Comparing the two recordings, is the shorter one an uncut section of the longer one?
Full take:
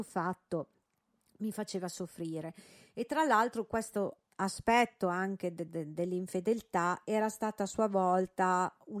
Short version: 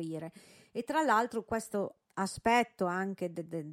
yes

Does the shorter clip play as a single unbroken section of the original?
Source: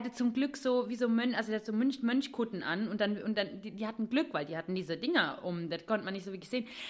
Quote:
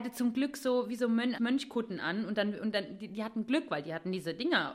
no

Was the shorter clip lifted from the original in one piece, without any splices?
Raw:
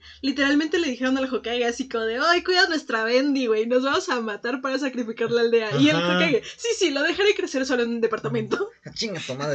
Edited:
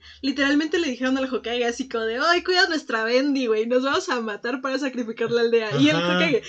yes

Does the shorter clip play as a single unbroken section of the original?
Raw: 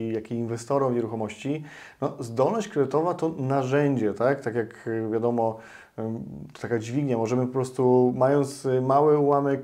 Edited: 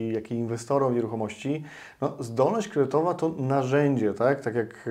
yes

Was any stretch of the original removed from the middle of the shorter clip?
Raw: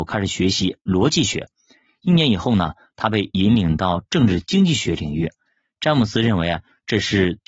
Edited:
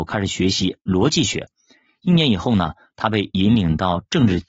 no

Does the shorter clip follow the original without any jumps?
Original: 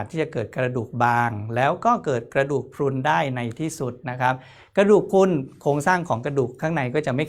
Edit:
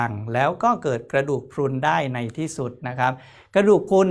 yes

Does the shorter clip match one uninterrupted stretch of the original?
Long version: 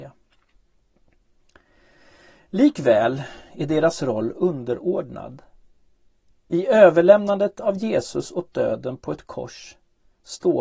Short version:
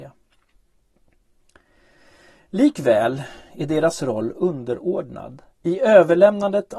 no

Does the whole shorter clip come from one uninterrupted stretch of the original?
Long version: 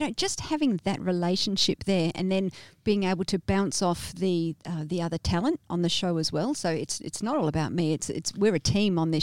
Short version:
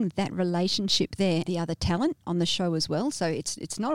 no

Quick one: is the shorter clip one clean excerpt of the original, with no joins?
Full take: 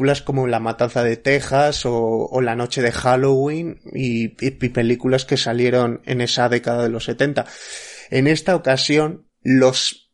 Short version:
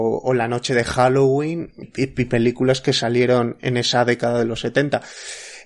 no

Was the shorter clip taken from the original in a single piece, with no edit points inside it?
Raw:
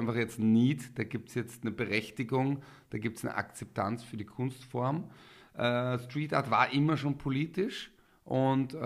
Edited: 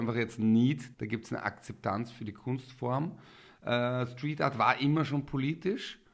no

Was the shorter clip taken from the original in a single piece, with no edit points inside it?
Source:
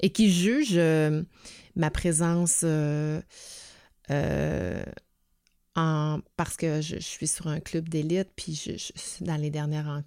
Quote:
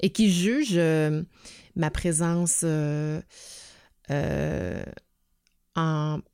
yes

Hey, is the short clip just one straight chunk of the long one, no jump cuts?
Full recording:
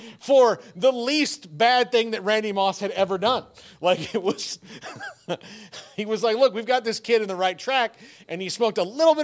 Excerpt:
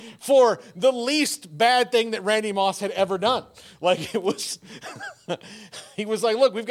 yes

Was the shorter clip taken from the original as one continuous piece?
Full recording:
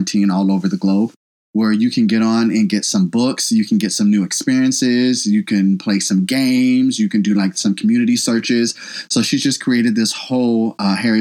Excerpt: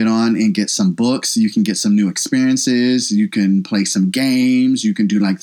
yes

